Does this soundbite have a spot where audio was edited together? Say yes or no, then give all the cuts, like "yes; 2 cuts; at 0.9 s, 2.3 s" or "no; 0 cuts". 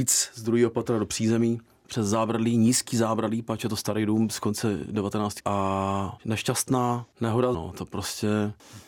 yes; 2 cuts; at 5.4 s, 7.5 s